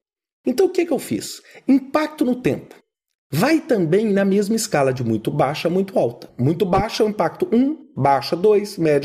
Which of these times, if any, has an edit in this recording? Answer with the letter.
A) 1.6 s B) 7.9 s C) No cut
C